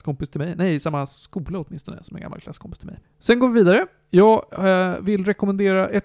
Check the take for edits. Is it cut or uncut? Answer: cut